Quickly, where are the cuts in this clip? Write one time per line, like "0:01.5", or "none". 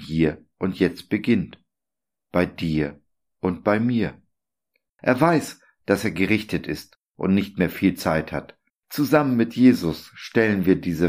0:04.9
0:08.7